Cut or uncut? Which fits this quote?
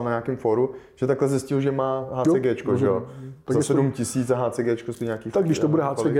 uncut